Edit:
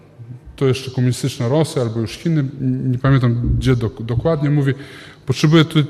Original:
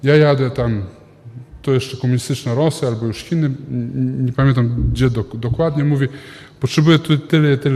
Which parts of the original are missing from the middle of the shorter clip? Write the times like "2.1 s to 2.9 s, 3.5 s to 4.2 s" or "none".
3.7 s to 3.9 s